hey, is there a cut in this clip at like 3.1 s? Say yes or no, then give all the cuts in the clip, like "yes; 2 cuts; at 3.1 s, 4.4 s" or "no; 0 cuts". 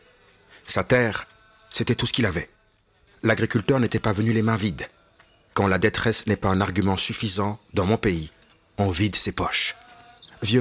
yes; 1 cut; at 3.1 s